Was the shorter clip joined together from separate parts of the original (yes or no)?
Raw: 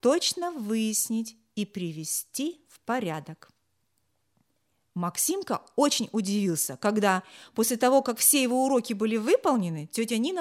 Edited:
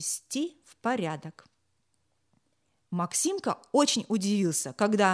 no